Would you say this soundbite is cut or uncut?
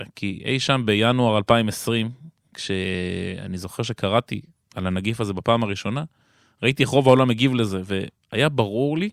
uncut